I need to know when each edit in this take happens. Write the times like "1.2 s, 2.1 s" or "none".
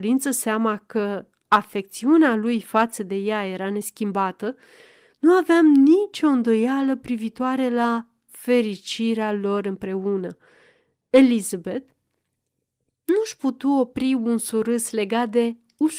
none